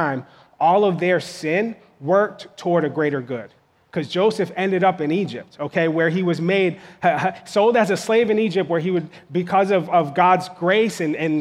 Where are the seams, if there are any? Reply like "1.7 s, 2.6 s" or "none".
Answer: none